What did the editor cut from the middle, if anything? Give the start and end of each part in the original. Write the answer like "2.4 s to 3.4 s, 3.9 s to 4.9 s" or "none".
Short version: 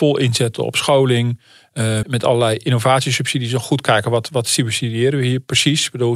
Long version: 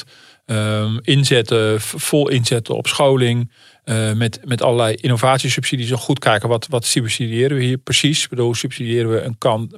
4.1 s to 4.4 s